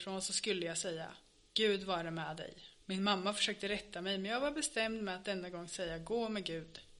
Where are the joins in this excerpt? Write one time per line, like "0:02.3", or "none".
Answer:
0:02.8